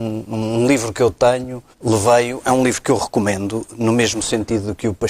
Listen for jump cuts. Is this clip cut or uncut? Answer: cut